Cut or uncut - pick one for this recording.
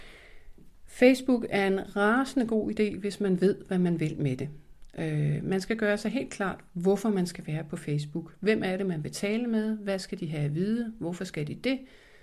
uncut